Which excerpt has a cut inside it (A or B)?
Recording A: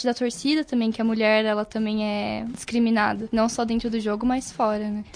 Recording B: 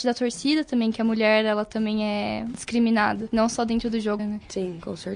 B